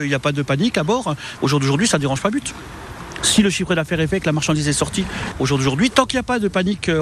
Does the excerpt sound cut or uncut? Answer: cut